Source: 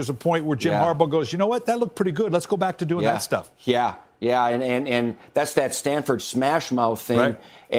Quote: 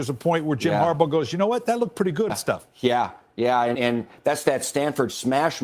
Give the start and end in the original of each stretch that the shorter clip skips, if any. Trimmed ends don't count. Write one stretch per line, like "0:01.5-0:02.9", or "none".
0:02.3-0:03.1
0:04.6-0:04.8